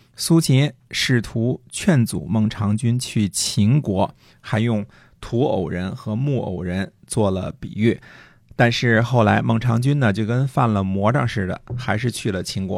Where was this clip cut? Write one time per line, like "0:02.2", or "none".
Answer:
none